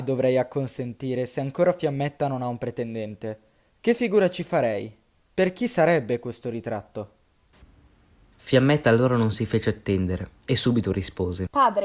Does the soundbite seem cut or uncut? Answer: uncut